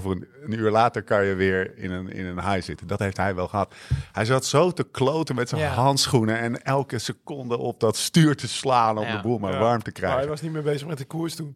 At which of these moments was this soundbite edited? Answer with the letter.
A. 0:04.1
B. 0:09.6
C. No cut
C